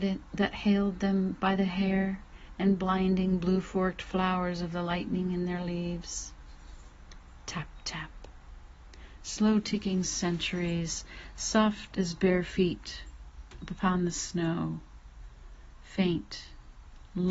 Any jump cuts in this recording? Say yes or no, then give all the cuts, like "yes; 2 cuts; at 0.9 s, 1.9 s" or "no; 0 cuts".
no; 0 cuts